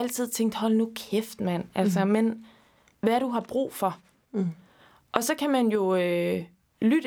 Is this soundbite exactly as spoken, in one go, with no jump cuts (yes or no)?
no